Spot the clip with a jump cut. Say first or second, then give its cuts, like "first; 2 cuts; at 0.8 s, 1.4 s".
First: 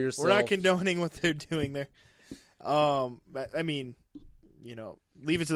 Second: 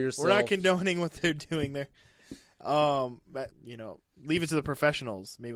second; 1 cut; at 3.5 s